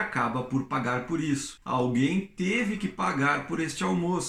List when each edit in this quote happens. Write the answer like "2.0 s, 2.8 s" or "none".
1.6 s